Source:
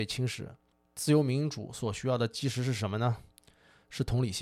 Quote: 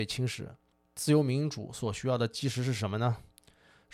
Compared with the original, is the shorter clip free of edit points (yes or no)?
yes